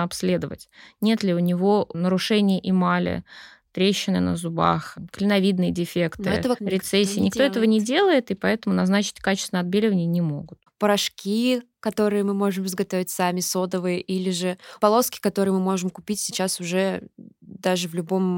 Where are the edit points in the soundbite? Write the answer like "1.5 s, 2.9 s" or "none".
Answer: 6.6 s, 10.7 s, 14.8 s